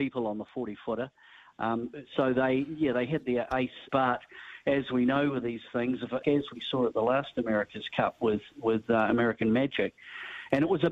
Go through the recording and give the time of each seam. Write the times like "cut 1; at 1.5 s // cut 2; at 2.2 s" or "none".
cut 1; at 3.9 s // cut 2; at 6.2 s